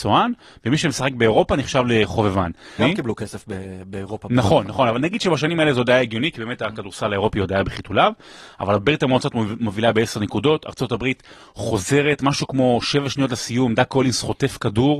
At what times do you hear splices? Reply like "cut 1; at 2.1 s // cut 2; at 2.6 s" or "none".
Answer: cut 1; at 2.8 s